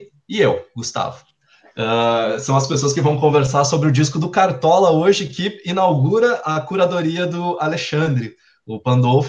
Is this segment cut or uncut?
uncut